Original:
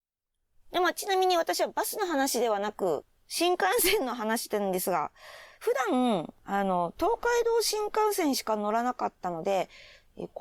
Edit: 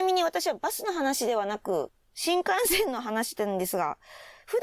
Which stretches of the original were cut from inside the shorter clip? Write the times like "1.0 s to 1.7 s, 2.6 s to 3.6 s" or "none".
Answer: none